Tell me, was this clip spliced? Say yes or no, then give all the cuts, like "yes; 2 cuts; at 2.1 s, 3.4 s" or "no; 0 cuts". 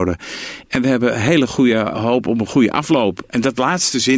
yes; 1 cut; at 1.9 s